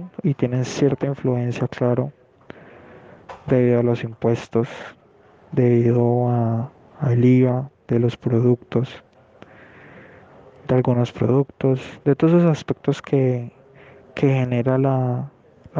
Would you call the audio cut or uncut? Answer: cut